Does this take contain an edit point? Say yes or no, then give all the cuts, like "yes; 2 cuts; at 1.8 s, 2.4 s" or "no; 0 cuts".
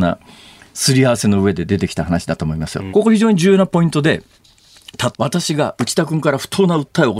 yes; 2 cuts; at 2.9 s, 5.1 s